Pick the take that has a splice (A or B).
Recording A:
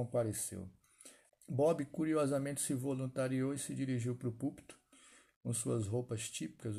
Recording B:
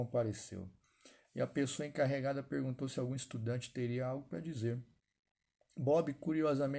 A